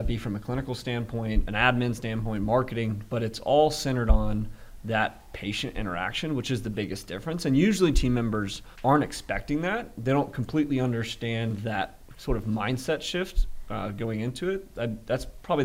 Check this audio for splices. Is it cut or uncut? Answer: cut